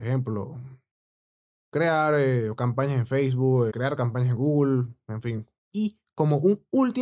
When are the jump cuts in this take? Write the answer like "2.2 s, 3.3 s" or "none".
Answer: 3.7 s, 5.6 s